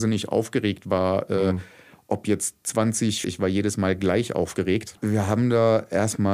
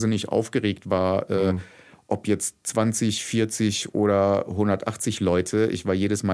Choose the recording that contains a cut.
first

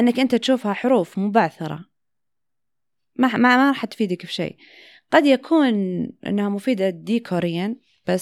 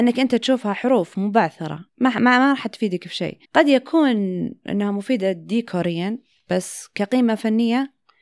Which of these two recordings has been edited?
second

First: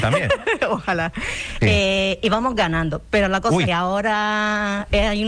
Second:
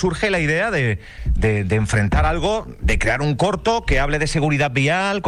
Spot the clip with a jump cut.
first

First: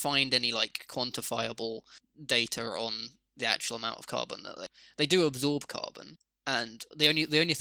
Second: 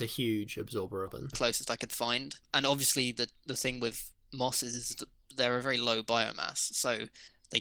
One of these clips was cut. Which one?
second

